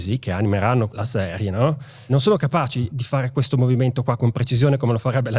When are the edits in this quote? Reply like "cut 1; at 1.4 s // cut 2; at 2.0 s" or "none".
none